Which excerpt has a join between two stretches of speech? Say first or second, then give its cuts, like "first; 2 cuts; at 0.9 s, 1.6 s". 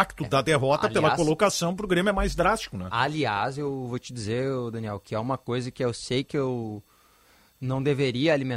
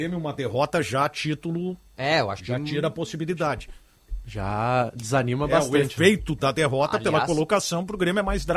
second; 1 cut; at 6.4 s